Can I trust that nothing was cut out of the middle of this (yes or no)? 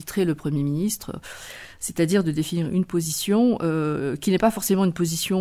yes